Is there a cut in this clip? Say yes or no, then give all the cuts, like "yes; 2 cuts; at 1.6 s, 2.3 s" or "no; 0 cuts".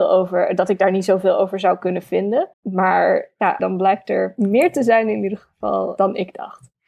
yes; 3 cuts; at 2.5 s, 3.6 s, 6.0 s